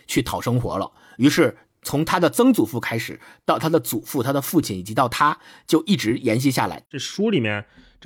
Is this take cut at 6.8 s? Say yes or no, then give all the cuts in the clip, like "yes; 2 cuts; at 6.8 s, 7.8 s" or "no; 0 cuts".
yes; 1 cut; at 6.8 s